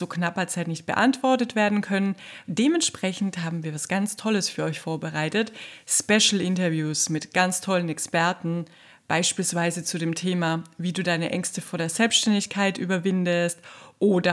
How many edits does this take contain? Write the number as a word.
one